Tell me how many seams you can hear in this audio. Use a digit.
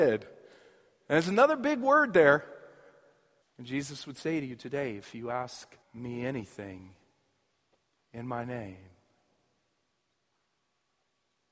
2